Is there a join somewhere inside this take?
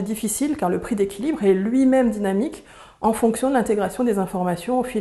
no; 0 cuts

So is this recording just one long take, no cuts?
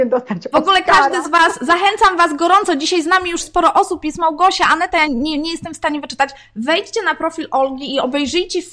no; 1 cut; at 5.1 s

